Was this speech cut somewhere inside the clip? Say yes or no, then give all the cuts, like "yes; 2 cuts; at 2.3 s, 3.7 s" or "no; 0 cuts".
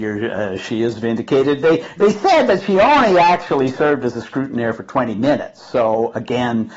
no; 0 cuts